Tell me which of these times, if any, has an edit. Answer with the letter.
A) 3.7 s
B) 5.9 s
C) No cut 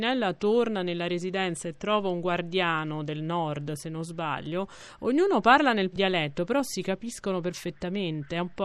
B